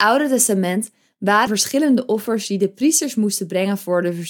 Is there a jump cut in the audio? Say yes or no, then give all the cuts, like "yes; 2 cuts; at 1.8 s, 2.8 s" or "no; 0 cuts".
yes; 1 cut; at 1.5 s